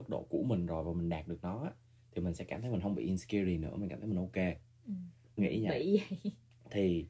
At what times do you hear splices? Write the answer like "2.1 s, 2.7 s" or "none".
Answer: 5.4 s